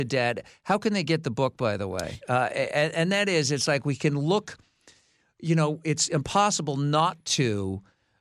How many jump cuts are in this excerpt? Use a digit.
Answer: 1